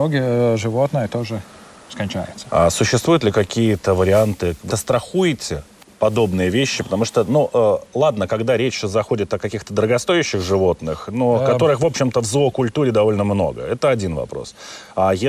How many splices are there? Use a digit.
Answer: 1